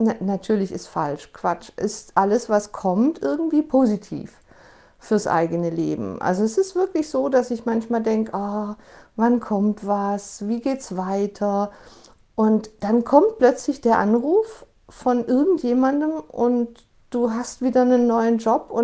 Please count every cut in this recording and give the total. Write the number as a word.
zero